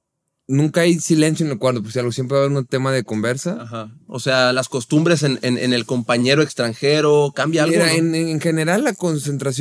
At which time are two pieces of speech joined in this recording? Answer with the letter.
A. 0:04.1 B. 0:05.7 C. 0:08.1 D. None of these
A